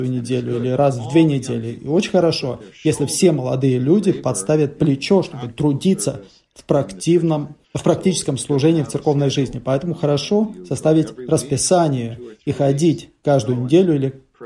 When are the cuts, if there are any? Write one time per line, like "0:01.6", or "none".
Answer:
0:07.6

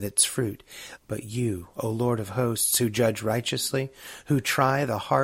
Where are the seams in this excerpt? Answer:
0:01.0

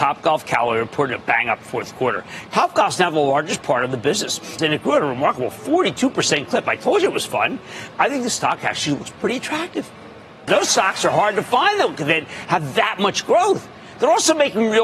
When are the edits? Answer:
0:04.6
0:07.9
0:10.5

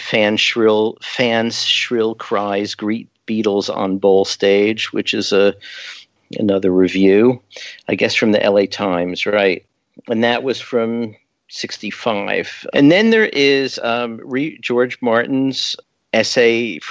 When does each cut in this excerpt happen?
0:12.7

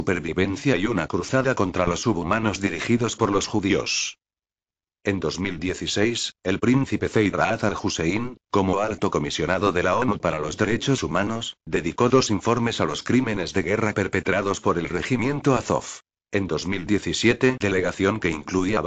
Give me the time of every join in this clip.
0:17.6

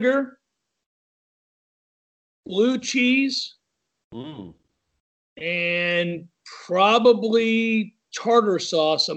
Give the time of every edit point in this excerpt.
none

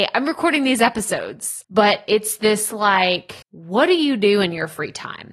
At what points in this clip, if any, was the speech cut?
0:01.6
0:03.4

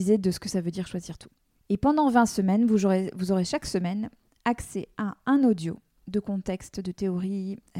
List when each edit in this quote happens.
0:01.6

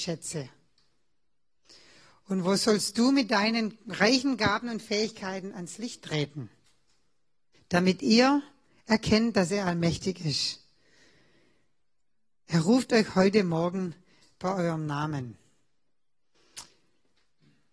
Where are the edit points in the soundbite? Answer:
0:07.5

